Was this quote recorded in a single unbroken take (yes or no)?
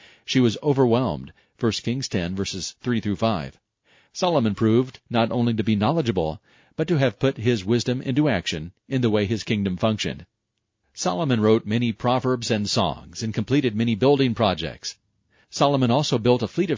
yes